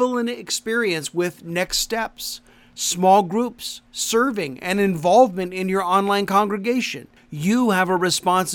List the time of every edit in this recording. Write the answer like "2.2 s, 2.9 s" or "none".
none

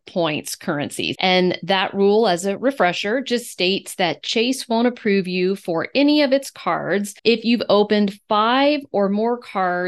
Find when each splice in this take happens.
1.1 s, 7.2 s

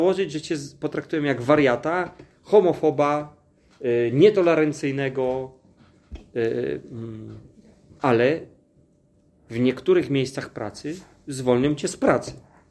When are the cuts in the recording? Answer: none

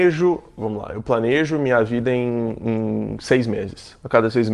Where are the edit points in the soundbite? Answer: none

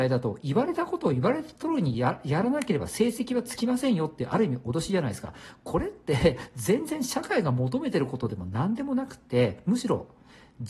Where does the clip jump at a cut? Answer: none

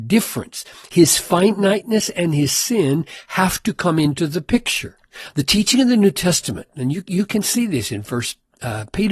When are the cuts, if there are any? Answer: 5.3 s

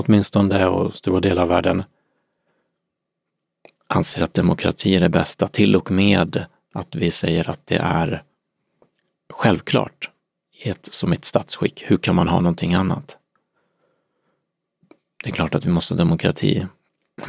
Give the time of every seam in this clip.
none

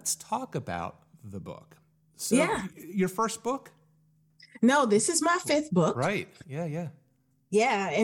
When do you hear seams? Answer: none

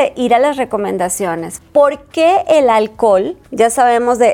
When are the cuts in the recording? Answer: 1.6 s

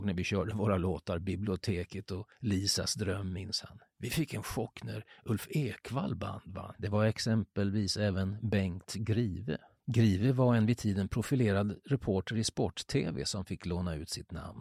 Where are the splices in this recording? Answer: 6.7 s

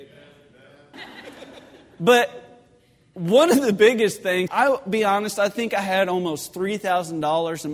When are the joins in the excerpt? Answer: 0.9 s, 4.5 s

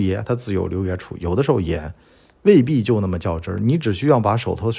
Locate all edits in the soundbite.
none

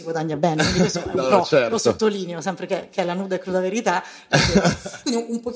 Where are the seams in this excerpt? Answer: none

